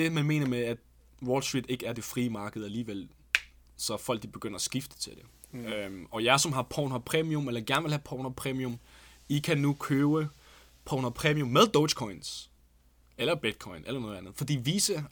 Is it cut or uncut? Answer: uncut